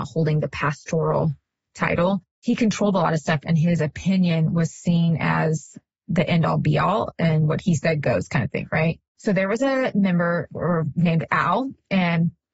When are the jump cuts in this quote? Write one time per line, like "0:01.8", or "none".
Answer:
none